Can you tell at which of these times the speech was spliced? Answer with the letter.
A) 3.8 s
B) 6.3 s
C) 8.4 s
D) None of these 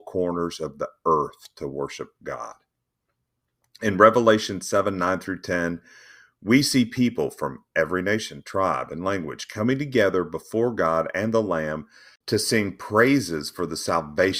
D